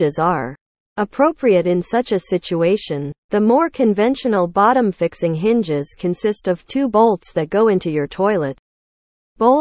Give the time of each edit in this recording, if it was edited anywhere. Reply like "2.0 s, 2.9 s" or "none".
3.2 s